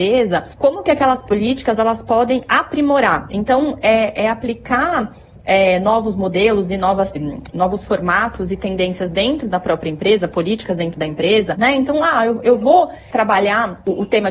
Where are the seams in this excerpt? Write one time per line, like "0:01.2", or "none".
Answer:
0:07.1
0:11.5